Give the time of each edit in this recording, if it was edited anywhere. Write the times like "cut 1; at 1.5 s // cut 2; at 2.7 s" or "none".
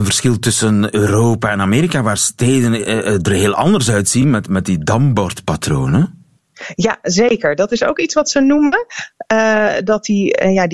none